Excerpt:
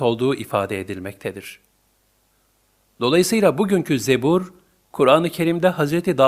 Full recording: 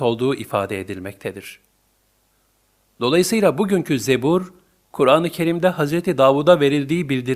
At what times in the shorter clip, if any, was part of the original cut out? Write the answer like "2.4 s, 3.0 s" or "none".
none